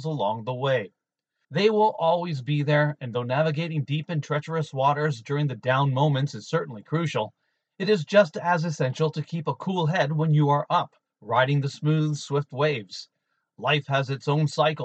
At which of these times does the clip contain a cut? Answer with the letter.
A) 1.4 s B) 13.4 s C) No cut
A